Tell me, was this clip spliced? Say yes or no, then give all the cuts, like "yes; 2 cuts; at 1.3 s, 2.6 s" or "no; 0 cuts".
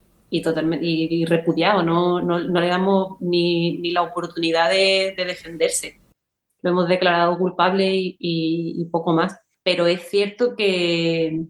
no; 0 cuts